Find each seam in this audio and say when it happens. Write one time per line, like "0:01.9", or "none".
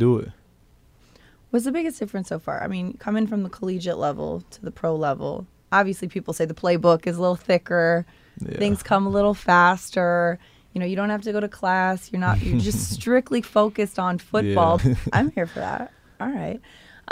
0:14.8